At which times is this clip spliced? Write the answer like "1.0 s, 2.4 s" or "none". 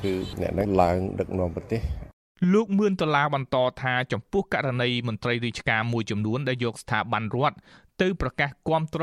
none

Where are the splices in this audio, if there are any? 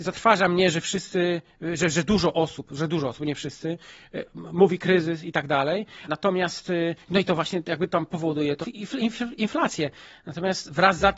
6.1 s, 8.6 s

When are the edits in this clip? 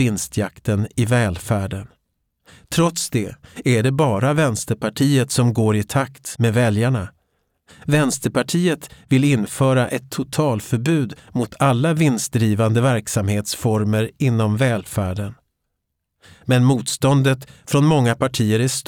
none

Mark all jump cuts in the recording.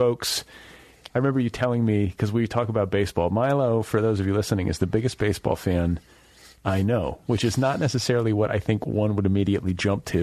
none

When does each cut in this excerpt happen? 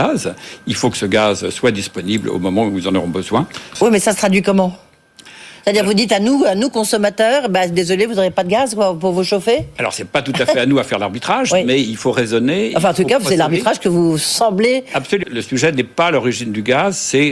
3.8 s, 15.2 s

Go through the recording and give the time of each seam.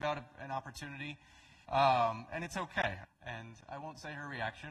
1.6 s, 3.0 s

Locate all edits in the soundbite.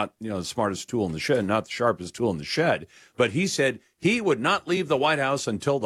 none

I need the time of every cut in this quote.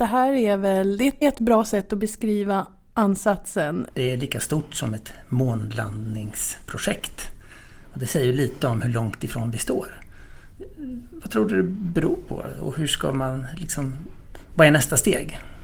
1.2 s, 3.9 s

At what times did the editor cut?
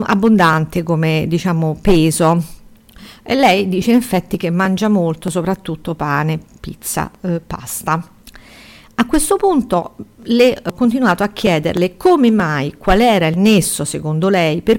none

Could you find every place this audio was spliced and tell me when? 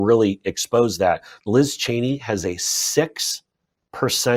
1.4 s

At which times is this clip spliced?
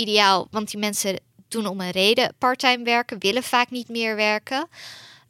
none

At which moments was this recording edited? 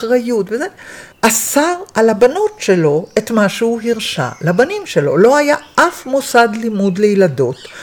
1.1 s

